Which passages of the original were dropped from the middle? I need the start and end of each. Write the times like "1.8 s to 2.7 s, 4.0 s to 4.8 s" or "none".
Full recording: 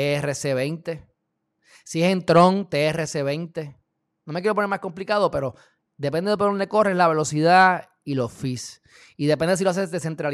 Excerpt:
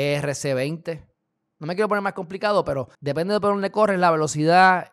1.5 s to 4.2 s, 5.6 s to 5.9 s